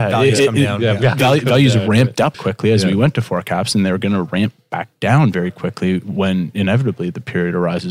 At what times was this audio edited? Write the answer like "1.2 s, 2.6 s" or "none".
2.3 s